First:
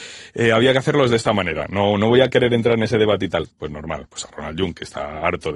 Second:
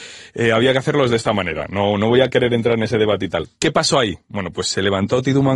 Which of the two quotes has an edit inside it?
first; 1 cut; at 3.5 s

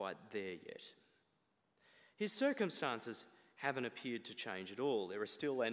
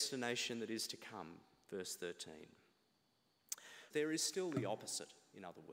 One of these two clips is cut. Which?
second; 1 cut; at 3.9 s

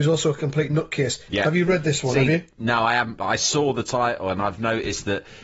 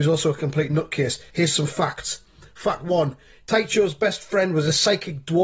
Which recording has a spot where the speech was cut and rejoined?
first; 1 cut; at 1.3 s

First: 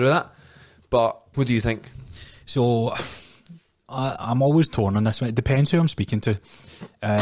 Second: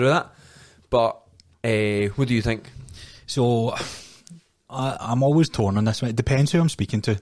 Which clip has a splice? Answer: first; 1 cut; at 1.3 s

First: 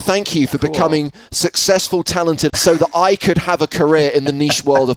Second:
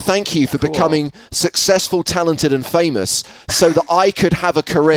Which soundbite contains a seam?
first; 1 cut; at 2.5 s

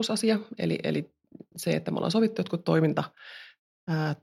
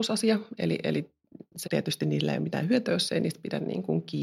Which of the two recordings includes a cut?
second; 1 cut; at 1.6 s

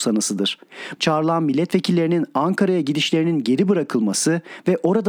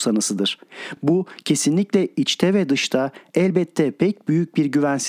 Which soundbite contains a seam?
first; 1 cut; at 1.0 s

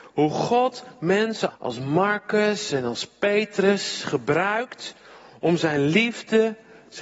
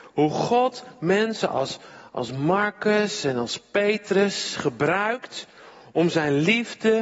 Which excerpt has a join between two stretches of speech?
first; 1 cut; at 1.5 s

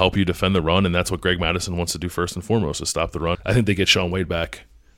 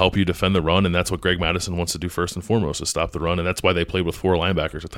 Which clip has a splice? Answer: first; 1 cut; at 3.3 s

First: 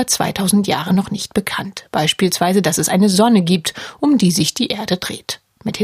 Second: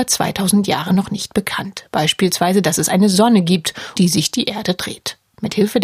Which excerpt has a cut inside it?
second; 1 cut; at 4.0 s

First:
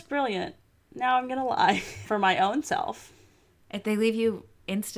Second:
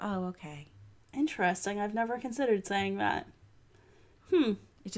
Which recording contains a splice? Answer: first; 1 cut; at 2.0 s

